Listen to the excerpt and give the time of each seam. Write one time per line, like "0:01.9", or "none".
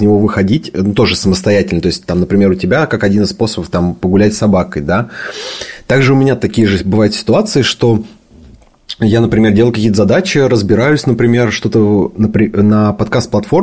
none